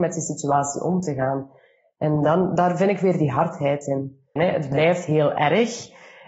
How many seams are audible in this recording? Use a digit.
1